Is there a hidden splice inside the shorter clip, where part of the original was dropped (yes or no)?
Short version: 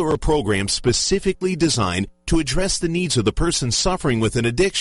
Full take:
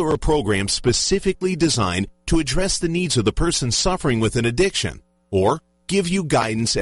no